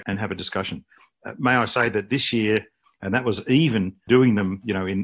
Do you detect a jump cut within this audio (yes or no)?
yes